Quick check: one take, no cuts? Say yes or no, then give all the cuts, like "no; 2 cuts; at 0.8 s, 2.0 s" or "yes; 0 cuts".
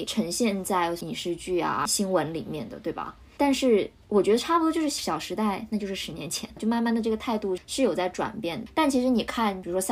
no; 3 cuts; at 6.6 s, 7.6 s, 8.7 s